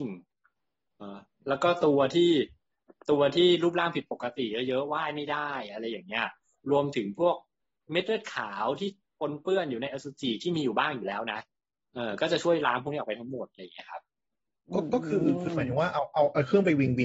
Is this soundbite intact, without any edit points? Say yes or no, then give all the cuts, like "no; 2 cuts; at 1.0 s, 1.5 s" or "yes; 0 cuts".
no; 1 cut; at 1.0 s